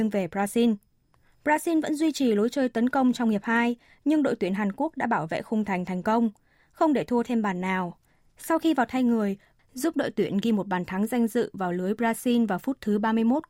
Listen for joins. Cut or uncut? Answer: cut